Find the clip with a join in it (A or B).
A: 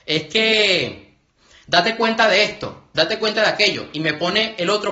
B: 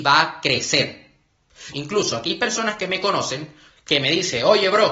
B